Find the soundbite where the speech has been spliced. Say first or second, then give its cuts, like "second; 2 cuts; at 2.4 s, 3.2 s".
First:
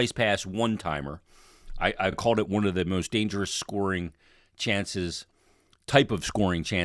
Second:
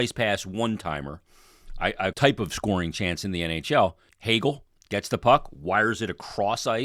second; 2 cuts; at 2.1 s, 4.1 s